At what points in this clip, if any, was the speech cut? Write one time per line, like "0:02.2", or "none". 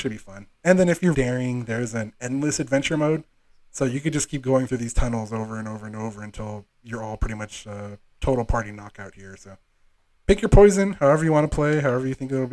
0:01.1